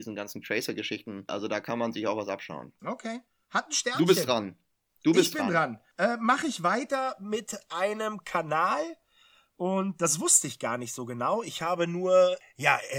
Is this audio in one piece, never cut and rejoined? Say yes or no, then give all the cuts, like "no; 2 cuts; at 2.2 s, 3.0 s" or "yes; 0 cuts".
no; 1 cut; at 1.3 s